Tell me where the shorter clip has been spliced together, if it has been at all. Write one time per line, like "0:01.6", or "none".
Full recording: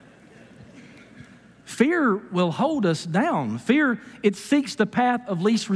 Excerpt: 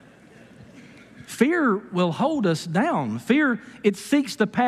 0:01.3